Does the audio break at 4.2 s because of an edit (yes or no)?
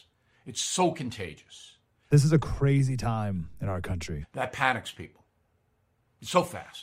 yes